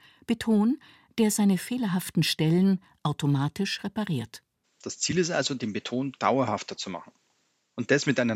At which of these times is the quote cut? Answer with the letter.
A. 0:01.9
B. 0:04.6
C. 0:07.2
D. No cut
B